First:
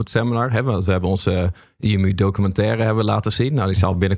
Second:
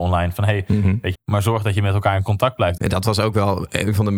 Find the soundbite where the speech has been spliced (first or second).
second